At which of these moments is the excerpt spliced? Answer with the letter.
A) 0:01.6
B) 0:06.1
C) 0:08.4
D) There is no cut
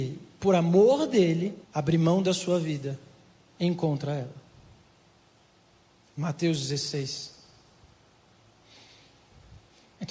A